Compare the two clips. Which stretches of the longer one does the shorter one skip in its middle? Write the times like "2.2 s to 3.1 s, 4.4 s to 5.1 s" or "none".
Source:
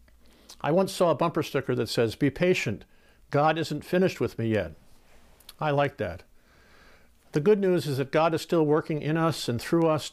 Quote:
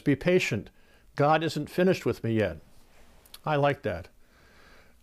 none